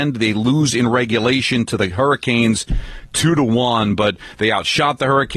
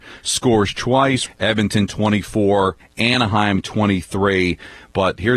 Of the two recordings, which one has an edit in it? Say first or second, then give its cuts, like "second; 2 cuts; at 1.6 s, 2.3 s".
second; 2 cuts; at 1.3 s, 2.8 s